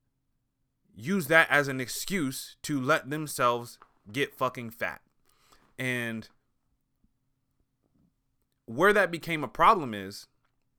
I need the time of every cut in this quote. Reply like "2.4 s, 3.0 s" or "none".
none

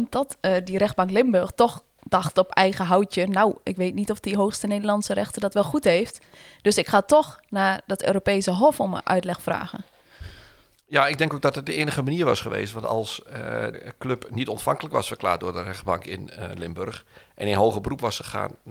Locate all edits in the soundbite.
13.7 s

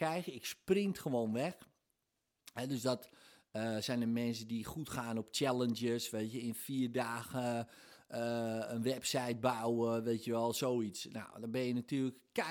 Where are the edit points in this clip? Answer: none

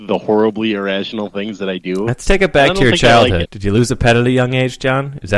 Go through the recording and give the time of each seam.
3.4 s

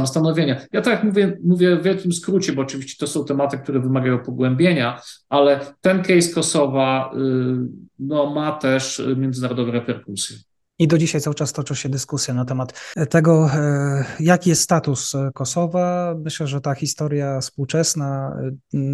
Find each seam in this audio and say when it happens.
none

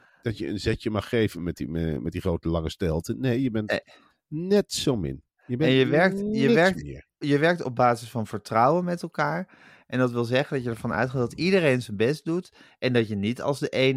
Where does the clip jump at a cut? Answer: none

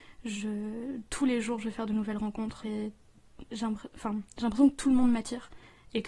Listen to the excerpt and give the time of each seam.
2.6 s

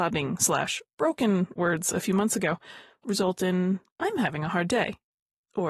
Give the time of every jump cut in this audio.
3.9 s

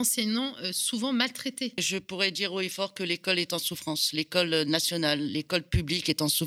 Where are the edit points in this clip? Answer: 1.8 s

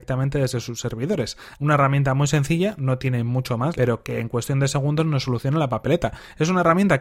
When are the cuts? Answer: 1.5 s, 3.7 s

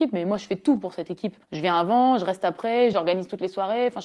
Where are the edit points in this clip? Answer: 1.4 s, 2.9 s

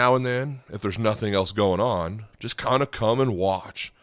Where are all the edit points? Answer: 2.3 s

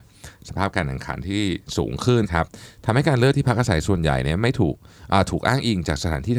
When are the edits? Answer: 2.2 s

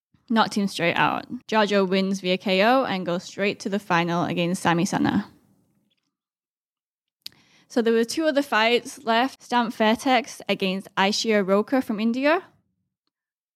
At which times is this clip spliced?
1.4 s, 9.4 s

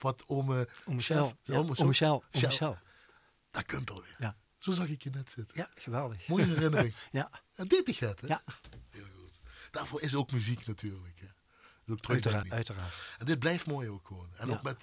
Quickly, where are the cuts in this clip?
4.4 s, 12.4 s

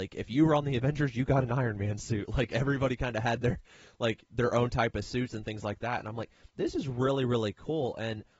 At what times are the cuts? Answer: none

